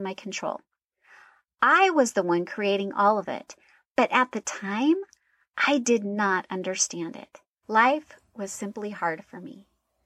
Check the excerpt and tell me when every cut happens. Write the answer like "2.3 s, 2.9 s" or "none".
7.6 s